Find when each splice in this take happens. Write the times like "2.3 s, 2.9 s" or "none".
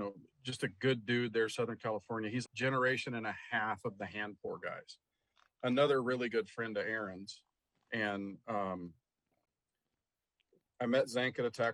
2.4 s